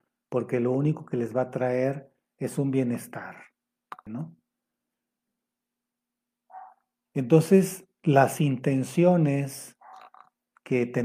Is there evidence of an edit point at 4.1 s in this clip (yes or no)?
yes